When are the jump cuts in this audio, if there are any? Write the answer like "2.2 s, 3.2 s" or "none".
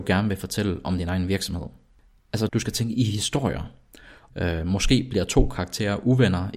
2.5 s, 4.3 s